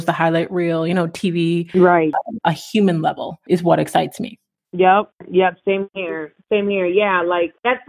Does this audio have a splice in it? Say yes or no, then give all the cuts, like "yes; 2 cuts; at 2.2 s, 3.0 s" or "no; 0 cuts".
yes; 1 cut; at 2.4 s